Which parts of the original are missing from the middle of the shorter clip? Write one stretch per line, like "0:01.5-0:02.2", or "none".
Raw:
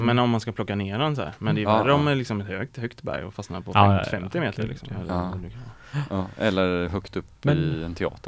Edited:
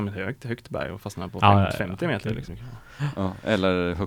0:04.8-0:05.4